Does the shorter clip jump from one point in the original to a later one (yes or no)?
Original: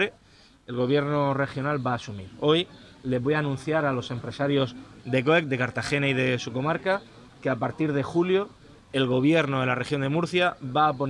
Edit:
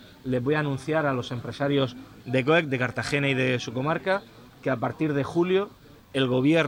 no